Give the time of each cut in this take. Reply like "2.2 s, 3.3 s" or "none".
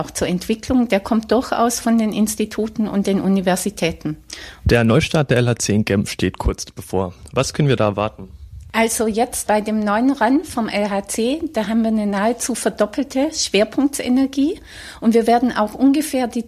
4.6 s, 9.5 s